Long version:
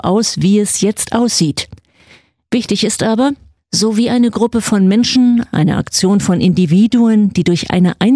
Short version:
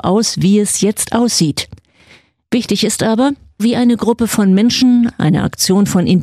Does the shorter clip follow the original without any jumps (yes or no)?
no